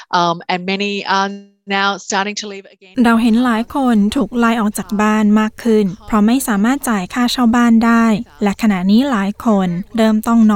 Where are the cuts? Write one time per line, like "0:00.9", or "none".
none